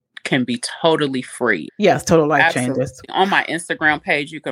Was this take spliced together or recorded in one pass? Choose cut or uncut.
cut